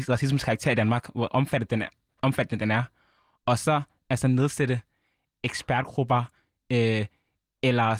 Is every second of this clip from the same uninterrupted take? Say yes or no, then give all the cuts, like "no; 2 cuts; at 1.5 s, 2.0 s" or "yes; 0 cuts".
yes; 0 cuts